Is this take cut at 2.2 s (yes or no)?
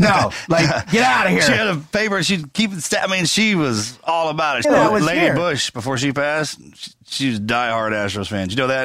no